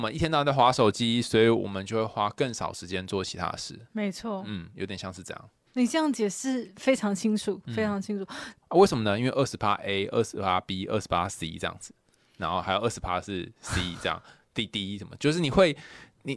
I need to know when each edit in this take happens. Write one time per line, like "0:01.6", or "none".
0:05.7
0:08.6